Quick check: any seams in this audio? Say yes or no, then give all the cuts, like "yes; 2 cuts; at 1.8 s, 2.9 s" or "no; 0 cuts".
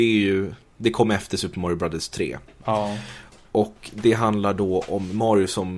no; 0 cuts